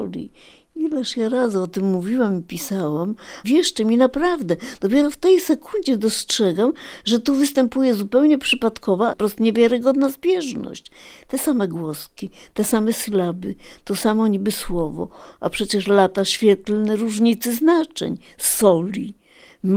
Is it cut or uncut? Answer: cut